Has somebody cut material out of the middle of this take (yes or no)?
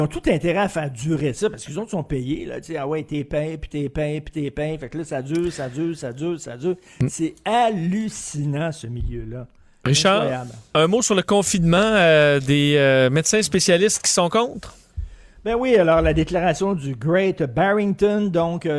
no